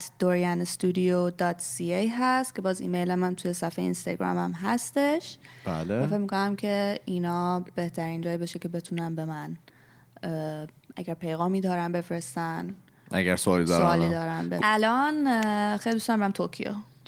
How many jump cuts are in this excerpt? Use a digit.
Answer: 1